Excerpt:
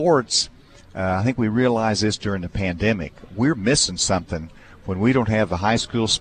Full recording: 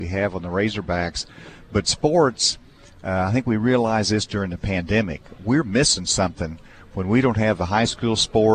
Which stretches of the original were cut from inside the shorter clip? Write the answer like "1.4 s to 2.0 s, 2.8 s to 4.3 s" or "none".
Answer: none